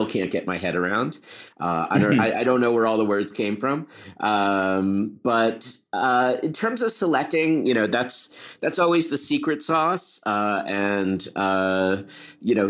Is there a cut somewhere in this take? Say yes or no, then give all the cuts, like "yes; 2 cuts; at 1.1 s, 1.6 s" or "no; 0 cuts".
no; 0 cuts